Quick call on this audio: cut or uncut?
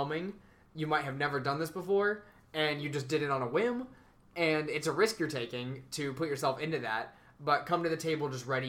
uncut